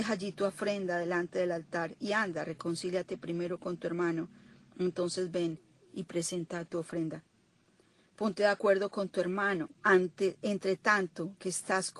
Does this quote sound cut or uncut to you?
cut